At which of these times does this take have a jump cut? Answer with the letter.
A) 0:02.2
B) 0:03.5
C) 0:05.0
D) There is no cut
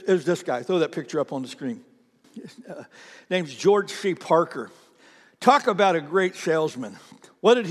A